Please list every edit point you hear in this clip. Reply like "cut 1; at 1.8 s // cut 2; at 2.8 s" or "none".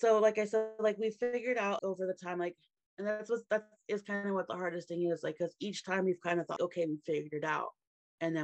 cut 1; at 1.8 s // cut 2; at 6.6 s